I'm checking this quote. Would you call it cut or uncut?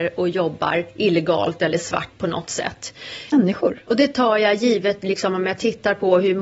cut